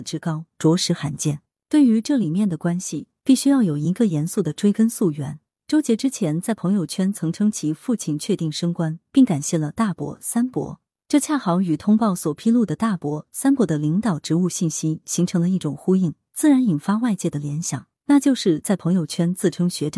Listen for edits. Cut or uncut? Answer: cut